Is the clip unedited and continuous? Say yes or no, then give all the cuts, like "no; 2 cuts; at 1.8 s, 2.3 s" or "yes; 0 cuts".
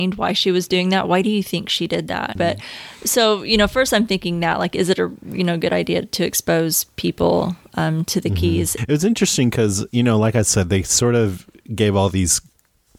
no; 2 cuts; at 2.4 s, 8.8 s